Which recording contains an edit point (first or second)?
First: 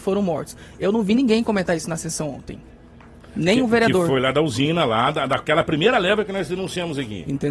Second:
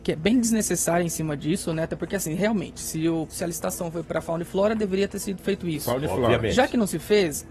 second